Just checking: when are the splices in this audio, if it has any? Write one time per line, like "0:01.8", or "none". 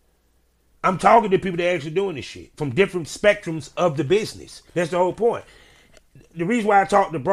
0:04.7